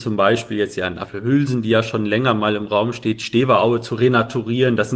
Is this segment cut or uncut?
uncut